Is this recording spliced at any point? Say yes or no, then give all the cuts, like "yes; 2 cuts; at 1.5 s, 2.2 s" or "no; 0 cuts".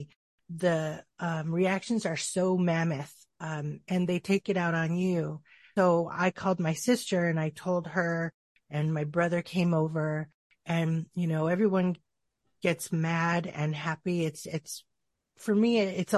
no; 0 cuts